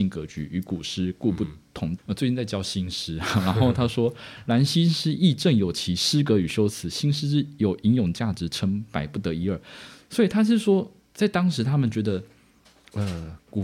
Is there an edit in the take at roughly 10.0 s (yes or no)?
no